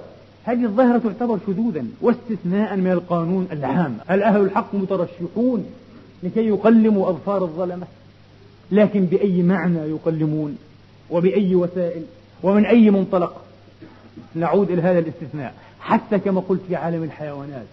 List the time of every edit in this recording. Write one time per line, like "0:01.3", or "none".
0:04.0